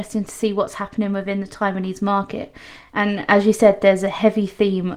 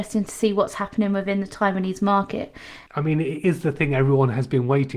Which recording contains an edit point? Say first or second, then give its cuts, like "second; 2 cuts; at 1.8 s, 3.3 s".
second; 1 cut; at 2.9 s